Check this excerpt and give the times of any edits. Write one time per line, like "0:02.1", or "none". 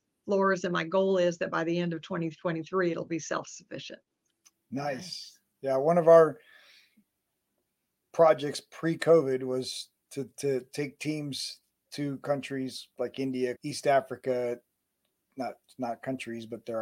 0:13.6